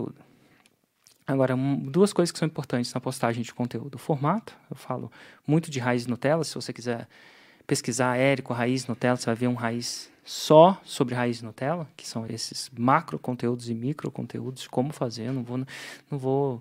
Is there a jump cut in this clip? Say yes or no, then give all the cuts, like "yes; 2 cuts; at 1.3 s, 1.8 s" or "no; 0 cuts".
yes; 1 cut; at 12.3 s